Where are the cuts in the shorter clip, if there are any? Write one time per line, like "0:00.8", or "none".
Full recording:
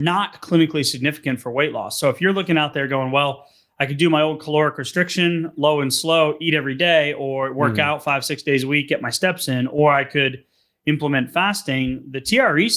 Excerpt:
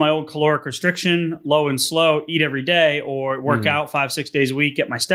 none